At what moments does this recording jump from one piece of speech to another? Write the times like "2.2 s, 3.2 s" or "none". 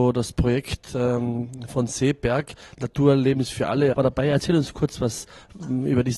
3.9 s